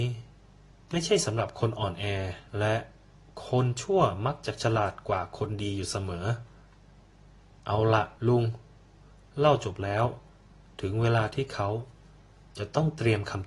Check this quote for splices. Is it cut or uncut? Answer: cut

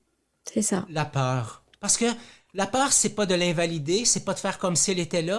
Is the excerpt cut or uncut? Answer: uncut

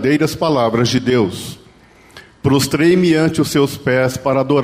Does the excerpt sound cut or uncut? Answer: uncut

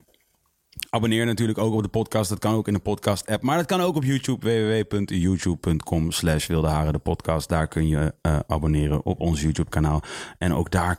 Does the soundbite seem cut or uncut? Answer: uncut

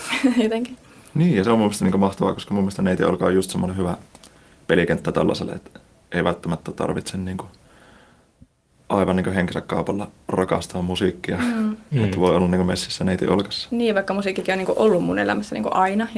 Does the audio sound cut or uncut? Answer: uncut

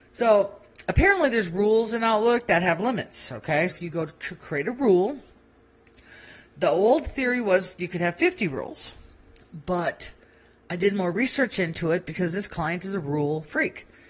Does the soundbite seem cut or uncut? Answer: cut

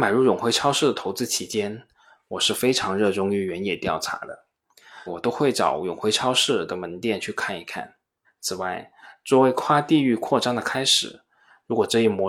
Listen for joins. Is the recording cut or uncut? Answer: cut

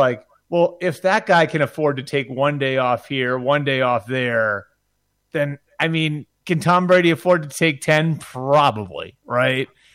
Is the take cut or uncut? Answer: uncut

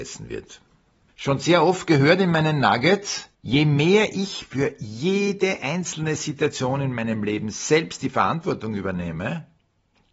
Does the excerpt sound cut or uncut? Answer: cut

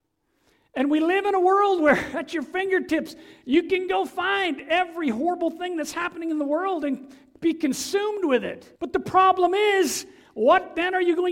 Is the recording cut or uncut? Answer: cut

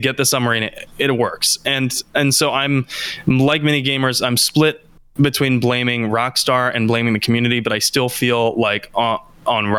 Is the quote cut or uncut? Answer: uncut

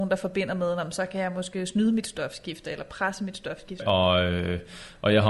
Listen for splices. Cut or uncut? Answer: cut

